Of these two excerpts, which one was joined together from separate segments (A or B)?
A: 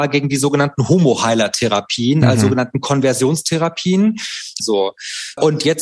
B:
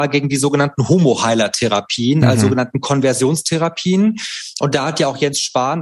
A